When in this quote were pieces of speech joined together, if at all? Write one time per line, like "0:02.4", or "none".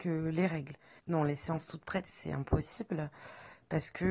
0:01.0
0:02.0